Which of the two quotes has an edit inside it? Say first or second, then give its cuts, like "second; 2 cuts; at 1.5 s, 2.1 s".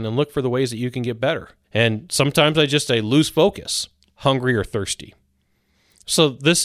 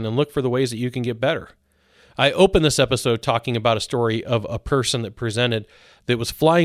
first; 2 cuts; at 1.6 s, 4.1 s